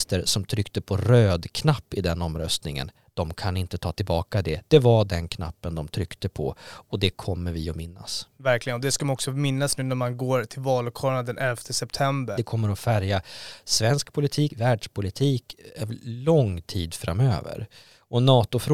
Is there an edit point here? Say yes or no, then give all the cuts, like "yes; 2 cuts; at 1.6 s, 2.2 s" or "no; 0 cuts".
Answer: yes; 3 cuts; at 8.4 s, 12.4 s, 14.5 s